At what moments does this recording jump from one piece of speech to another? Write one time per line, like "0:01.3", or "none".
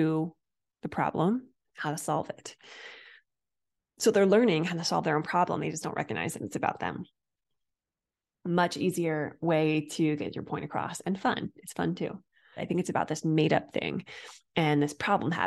0:12.6